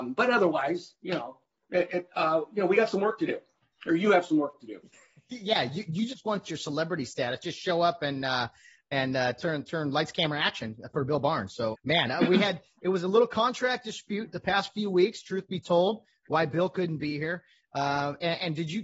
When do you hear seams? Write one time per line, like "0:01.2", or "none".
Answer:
0:11.7